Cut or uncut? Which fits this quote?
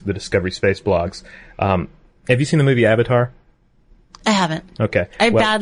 uncut